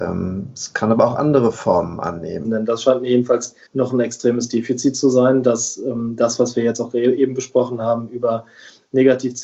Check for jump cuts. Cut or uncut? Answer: cut